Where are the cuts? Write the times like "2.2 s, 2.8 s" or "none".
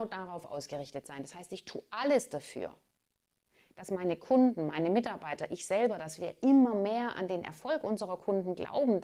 none

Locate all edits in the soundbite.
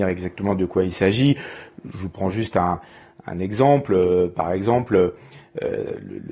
none

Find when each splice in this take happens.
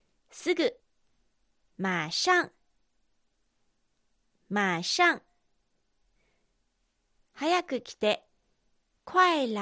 7.2 s

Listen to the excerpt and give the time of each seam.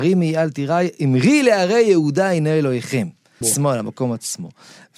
3.4 s

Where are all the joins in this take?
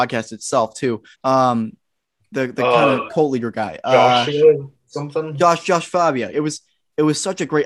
1.1 s, 6.3 s

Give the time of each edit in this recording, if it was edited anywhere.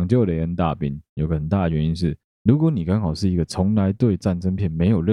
1.2 s, 2.3 s

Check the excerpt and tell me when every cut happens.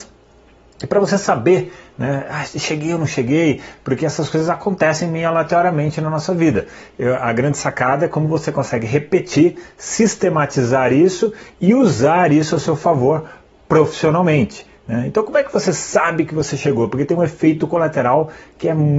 none

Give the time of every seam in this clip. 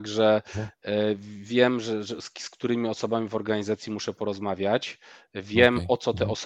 none

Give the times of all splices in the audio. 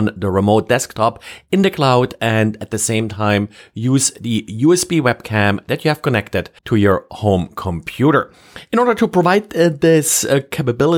6.6 s

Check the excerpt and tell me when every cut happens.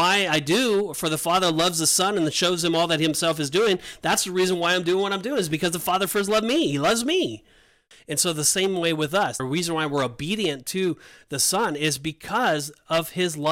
7.9 s, 9.4 s

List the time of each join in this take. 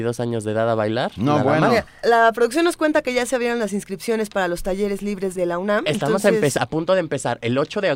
2.0 s, 5.4 s

